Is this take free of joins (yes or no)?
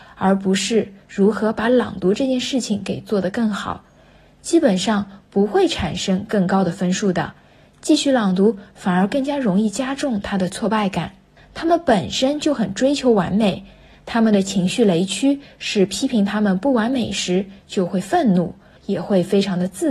no